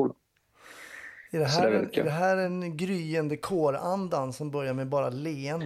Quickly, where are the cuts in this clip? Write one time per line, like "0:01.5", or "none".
none